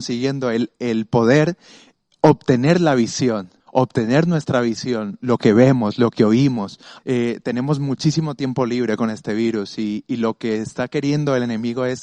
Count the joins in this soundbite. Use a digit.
2